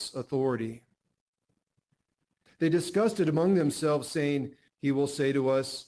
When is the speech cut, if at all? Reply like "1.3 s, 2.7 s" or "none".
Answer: 2.5 s, 4.7 s

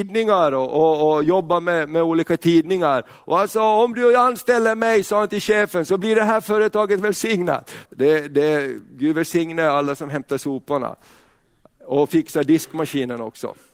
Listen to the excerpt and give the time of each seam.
7.9 s

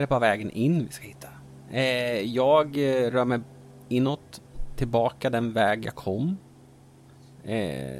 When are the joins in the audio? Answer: none

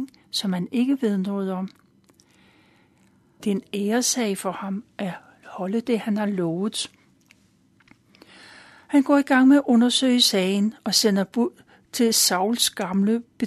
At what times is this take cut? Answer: 3.4 s

